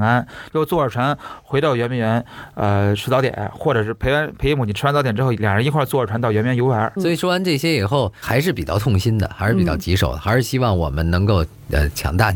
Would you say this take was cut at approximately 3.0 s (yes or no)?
no